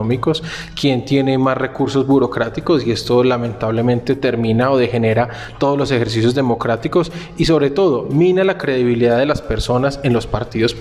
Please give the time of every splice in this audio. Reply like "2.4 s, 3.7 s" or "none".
none